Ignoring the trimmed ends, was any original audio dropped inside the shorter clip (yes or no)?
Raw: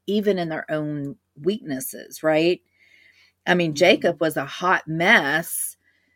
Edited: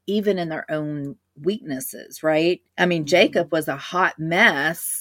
yes